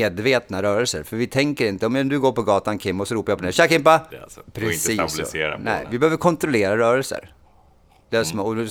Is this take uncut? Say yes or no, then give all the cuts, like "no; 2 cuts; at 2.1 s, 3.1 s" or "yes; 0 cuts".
no; 1 cut; at 4.1 s